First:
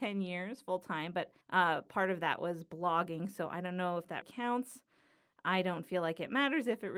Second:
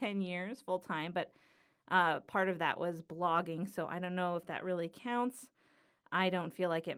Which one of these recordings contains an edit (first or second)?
first